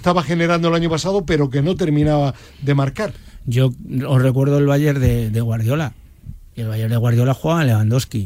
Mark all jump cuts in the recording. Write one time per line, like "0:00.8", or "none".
none